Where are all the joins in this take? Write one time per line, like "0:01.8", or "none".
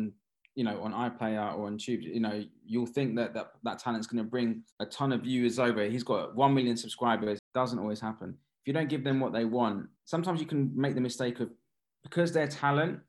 0:07.4
0:10.0